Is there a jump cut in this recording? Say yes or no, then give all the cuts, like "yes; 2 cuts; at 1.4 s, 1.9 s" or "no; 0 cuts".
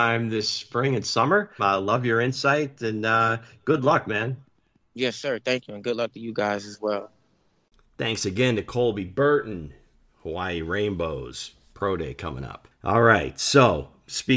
yes; 1 cut; at 1.6 s